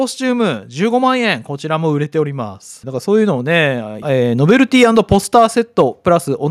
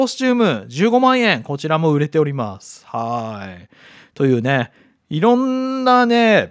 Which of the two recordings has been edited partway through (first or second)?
first